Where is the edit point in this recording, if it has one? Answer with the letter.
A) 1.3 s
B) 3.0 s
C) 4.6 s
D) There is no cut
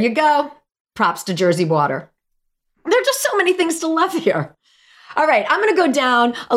D